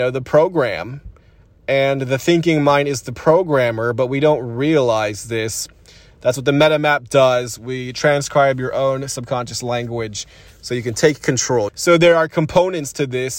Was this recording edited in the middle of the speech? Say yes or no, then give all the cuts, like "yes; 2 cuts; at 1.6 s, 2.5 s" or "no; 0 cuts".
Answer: yes; 1 cut; at 11.7 s